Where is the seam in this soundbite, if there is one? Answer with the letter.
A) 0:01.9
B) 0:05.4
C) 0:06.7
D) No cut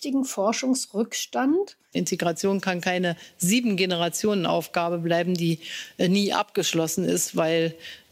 A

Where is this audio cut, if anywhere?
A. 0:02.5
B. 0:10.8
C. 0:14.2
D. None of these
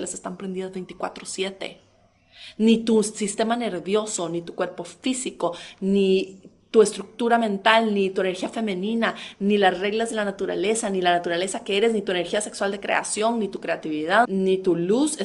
C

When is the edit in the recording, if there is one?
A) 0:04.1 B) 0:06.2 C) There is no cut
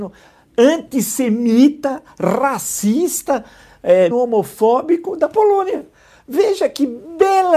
A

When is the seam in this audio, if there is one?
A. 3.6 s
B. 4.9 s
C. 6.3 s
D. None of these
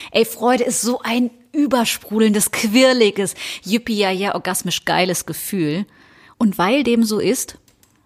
C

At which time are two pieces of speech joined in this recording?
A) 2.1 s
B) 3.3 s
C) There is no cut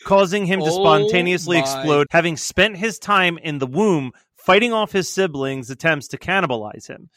A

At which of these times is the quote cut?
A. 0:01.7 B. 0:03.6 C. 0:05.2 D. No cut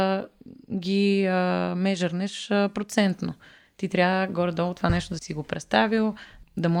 C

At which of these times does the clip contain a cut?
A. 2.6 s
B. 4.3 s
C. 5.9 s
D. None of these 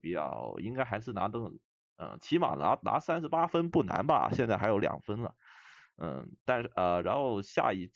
D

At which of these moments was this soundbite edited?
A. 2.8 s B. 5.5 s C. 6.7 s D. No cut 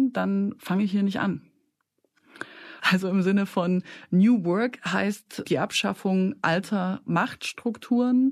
A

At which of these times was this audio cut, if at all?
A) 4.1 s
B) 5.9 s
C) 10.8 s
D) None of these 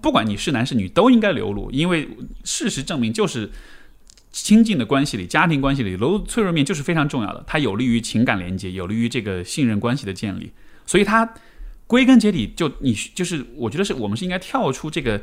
D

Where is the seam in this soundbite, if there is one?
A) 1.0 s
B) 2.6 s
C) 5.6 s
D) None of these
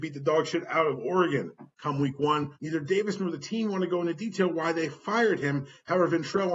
B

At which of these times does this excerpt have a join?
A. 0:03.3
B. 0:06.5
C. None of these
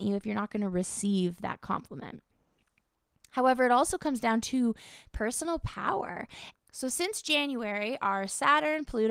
B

